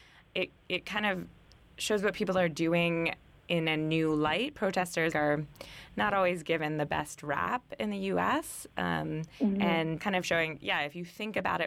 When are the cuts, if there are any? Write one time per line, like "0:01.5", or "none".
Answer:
0:05.1
0:10.0